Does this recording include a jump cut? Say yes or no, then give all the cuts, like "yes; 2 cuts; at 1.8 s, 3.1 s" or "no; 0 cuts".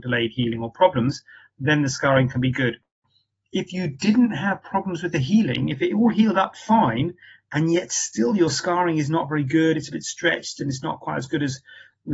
no; 0 cuts